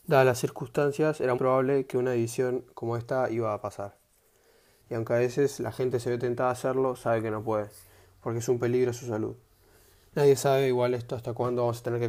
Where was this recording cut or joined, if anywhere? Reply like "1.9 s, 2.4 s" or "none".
1.4 s, 4.8 s

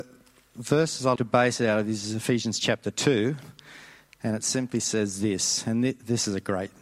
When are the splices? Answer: 1.2 s

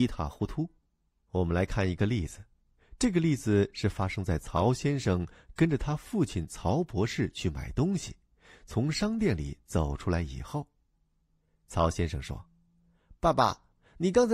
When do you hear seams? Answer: none

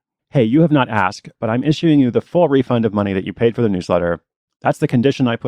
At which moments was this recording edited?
none

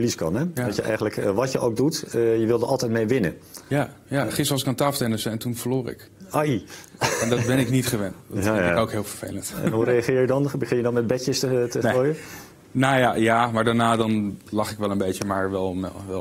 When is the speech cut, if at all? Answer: none

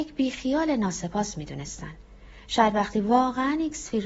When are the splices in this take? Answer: none

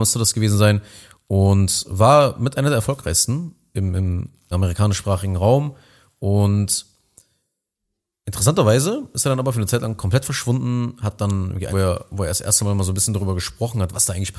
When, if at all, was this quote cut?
4.5 s, 11.7 s

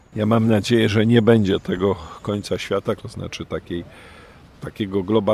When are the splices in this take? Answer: 3.0 s

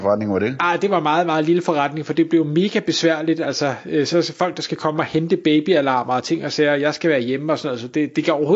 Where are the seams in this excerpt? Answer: none

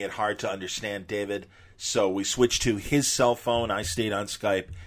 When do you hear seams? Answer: none

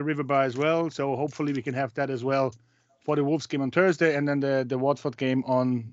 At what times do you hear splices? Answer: none

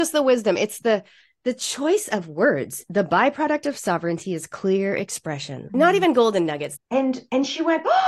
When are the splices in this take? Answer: 5.7 s, 6.8 s

